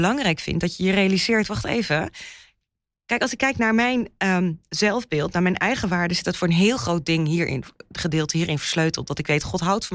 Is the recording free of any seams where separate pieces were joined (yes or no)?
yes